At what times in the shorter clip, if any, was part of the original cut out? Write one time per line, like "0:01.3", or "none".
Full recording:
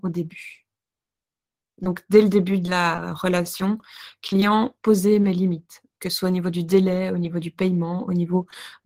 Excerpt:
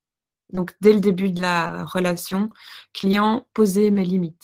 none